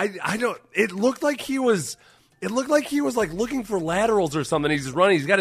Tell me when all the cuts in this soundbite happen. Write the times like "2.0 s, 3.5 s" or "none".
none